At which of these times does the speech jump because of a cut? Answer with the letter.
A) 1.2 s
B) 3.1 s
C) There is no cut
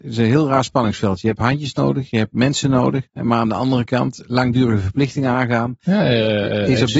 B